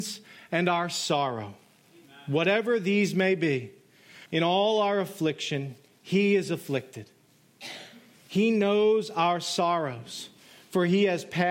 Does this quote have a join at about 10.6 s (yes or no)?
no